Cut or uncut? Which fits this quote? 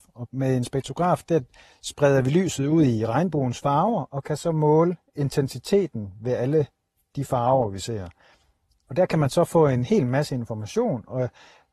uncut